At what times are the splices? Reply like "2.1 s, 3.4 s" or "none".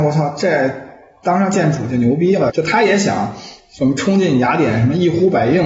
2.5 s